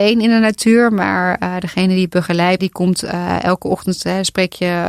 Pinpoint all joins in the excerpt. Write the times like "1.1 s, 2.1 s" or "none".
2.6 s